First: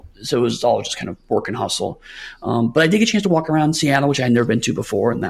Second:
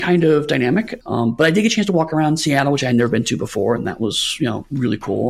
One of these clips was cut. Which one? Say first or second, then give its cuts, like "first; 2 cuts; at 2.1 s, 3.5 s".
second; 1 cut; at 1.0 s